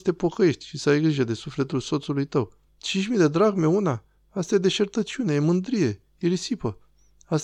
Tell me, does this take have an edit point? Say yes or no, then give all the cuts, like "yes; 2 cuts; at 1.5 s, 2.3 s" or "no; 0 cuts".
yes; 1 cut; at 2.7 s